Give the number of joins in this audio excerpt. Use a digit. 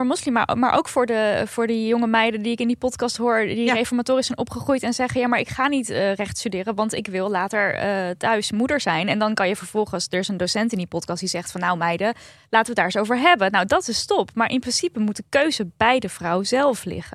0